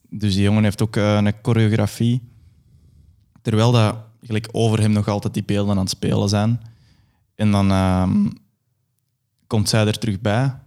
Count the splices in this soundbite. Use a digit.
0